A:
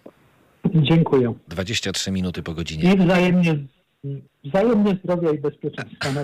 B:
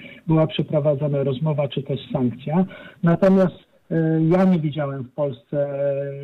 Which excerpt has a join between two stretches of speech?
A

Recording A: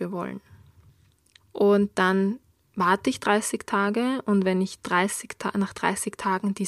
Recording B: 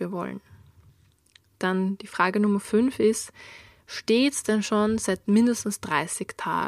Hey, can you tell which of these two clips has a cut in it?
A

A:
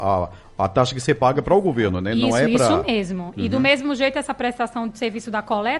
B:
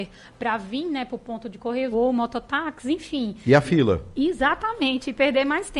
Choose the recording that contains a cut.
B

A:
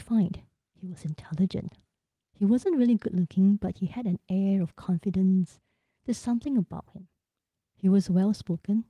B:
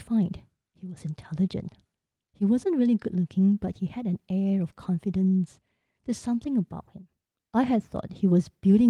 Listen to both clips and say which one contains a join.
B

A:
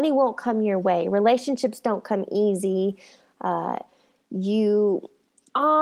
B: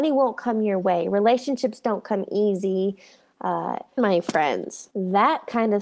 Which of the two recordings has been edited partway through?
B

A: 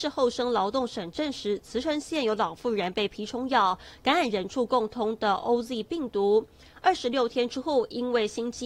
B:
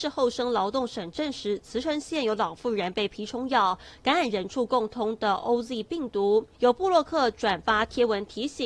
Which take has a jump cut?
B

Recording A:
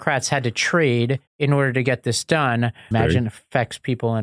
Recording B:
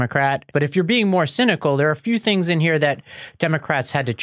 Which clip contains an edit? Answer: A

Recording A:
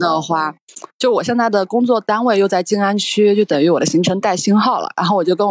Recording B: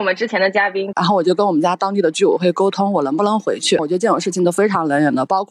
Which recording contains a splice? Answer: B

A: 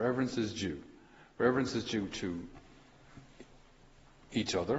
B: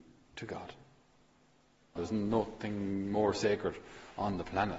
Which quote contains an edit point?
B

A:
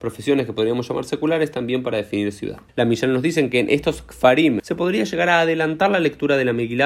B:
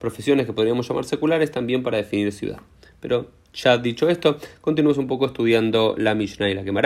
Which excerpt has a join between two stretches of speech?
A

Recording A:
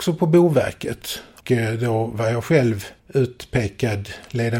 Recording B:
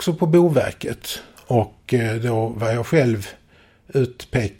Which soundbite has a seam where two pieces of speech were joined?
A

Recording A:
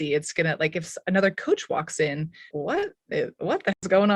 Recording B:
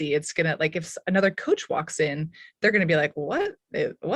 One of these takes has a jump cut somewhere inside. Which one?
A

